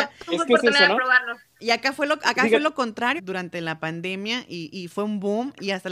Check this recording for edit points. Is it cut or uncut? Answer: cut